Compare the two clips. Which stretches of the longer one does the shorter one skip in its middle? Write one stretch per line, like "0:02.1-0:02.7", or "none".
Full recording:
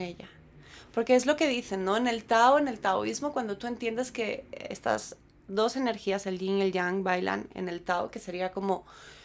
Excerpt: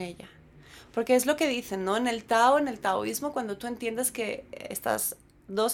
none